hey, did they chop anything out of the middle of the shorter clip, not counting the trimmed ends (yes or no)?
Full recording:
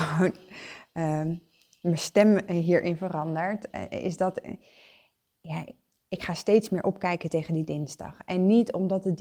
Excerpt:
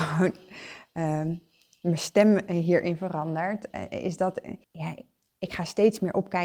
yes